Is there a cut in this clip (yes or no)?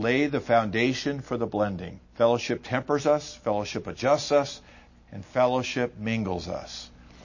yes